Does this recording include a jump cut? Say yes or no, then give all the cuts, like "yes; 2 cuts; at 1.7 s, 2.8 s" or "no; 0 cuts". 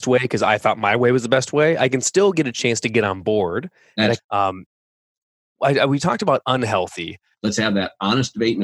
yes; 2 cuts; at 4.2 s, 7.3 s